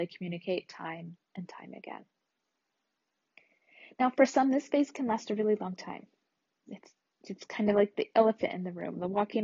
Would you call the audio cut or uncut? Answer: uncut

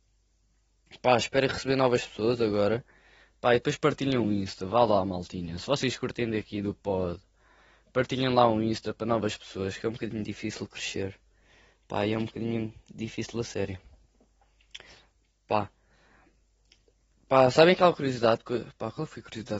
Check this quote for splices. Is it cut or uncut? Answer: cut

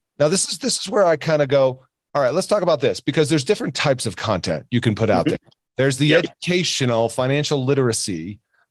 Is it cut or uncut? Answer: uncut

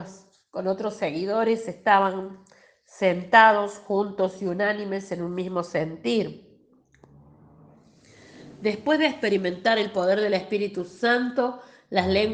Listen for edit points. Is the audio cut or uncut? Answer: uncut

